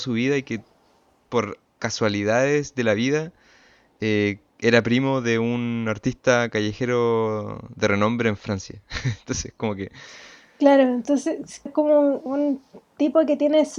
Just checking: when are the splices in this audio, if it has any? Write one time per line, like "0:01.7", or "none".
0:11.7